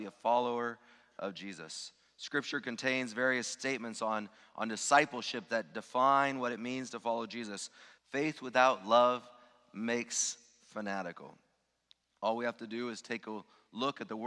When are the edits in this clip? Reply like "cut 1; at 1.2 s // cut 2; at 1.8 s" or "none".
cut 1; at 8.0 s